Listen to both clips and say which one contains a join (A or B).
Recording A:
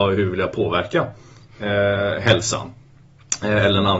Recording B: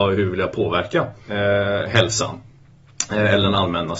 B